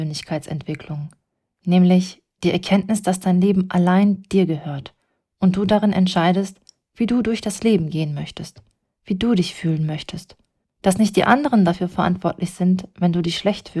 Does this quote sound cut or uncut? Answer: cut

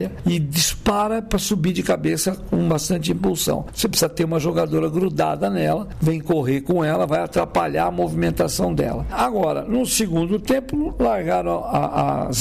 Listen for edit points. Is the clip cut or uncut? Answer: cut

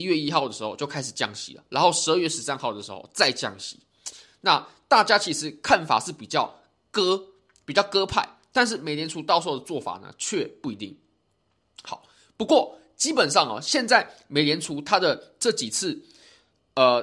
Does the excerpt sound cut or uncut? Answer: uncut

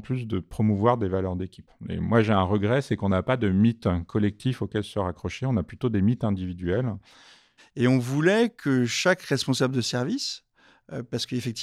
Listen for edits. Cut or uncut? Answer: cut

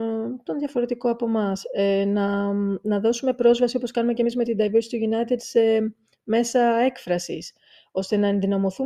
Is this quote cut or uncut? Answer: uncut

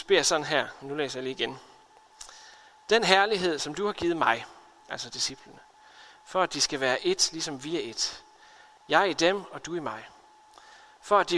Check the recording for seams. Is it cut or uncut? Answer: cut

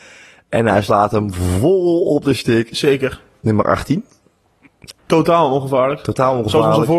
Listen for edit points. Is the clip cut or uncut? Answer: cut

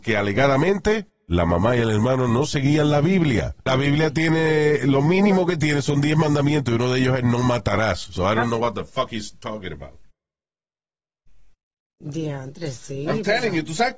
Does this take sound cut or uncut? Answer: cut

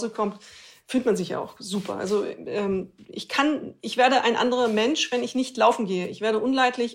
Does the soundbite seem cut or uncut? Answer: uncut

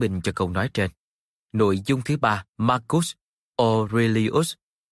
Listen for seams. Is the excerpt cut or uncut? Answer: cut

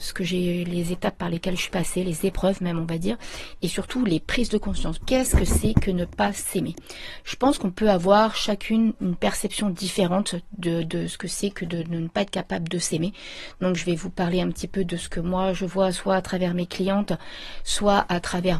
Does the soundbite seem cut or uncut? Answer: cut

